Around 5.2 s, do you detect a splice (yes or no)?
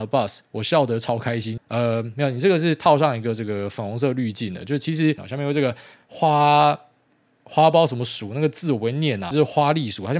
yes